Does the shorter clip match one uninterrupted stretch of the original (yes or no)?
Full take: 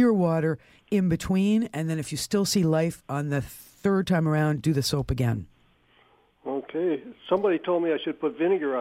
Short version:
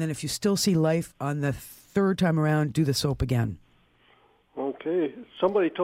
yes